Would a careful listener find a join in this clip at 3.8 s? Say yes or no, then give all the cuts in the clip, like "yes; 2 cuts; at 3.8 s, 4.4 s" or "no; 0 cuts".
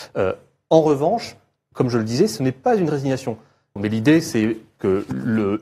yes; 1 cut; at 3.8 s